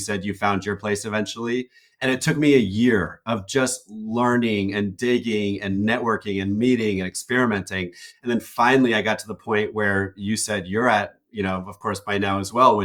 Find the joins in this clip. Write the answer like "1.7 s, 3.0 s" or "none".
none